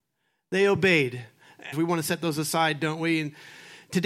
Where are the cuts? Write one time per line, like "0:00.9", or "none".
0:01.7